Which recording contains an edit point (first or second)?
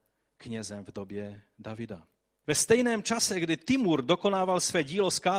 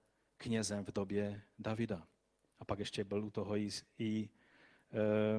first